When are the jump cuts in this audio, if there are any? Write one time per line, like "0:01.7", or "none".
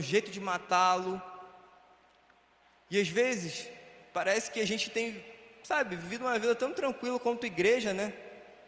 none